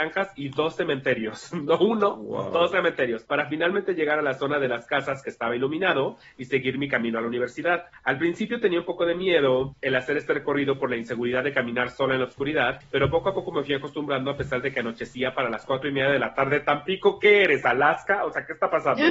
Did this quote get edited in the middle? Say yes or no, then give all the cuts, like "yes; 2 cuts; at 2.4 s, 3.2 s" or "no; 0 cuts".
no; 0 cuts